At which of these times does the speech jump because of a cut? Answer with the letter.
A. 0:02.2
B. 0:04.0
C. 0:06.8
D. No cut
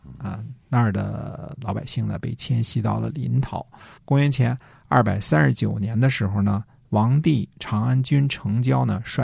B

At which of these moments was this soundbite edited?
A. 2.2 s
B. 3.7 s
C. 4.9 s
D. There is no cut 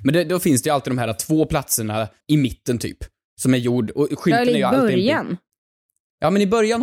A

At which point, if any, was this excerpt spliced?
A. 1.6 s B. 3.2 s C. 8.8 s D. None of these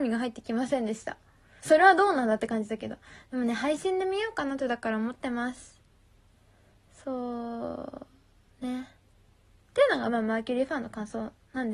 A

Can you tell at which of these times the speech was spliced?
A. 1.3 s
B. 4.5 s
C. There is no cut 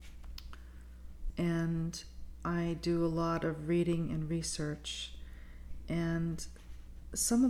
A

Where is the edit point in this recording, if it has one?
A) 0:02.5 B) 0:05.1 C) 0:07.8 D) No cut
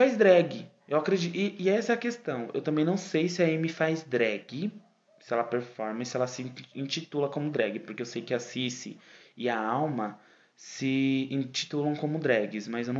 D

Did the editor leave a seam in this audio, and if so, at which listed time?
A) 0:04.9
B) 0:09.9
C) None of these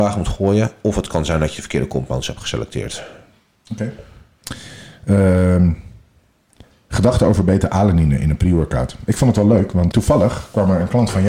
B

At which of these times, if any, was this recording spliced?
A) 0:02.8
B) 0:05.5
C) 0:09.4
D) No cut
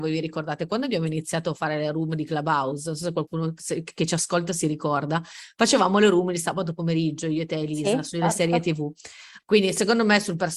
C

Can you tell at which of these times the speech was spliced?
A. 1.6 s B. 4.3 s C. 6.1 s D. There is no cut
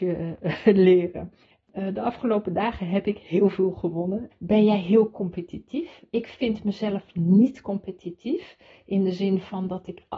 B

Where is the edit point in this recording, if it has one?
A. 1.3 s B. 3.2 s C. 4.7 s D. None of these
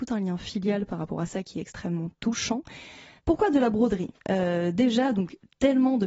B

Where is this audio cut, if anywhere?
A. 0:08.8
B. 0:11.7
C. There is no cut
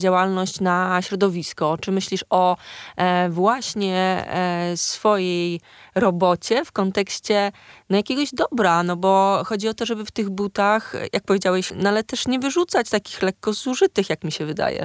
B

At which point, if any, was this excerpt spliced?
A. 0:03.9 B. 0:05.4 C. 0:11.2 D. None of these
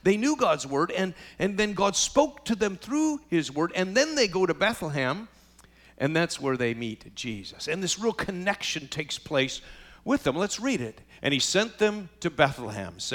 C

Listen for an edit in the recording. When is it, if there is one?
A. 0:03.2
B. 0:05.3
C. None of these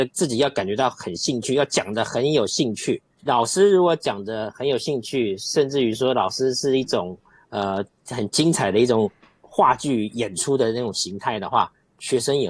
A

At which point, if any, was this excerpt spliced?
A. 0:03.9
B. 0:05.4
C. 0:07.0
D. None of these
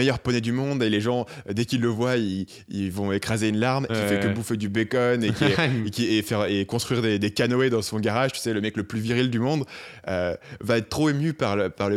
A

